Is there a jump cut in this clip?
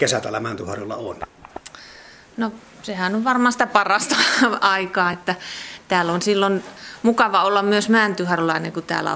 no; 0 cuts

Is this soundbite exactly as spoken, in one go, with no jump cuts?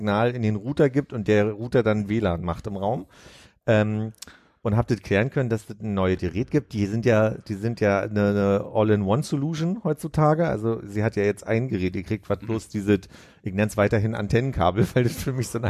yes; 0 cuts

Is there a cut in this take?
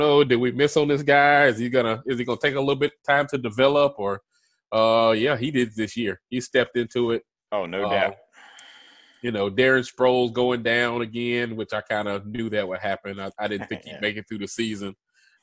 no; 0 cuts

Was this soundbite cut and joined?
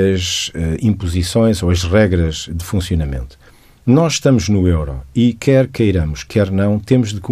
no; 0 cuts

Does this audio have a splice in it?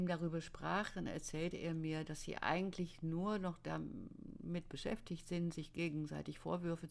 no; 0 cuts

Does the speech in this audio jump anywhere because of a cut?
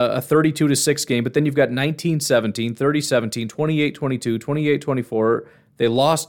no; 0 cuts

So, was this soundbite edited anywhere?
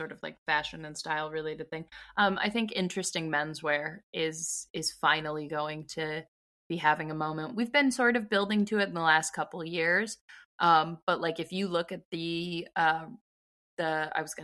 no; 0 cuts

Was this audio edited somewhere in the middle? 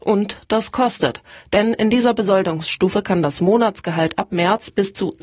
no; 0 cuts

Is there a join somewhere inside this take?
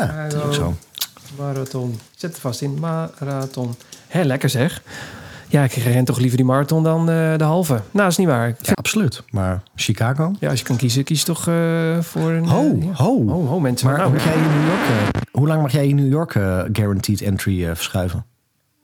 yes; 2 cuts; at 8.7 s, 14.2 s

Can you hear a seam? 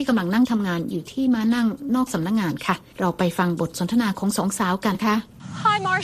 yes; 1 cut; at 4.9 s

